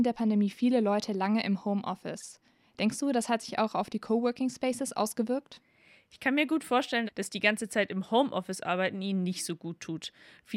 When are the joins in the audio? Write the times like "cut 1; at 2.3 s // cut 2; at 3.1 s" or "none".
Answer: cut 1; at 7.1 s